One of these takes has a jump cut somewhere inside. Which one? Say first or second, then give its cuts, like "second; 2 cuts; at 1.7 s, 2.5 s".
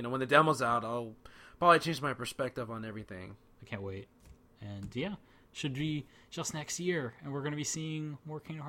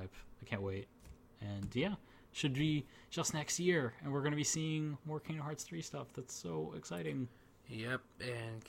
first; 1 cut; at 3.5 s